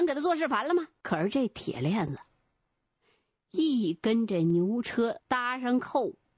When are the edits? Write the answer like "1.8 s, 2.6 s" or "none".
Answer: 1.0 s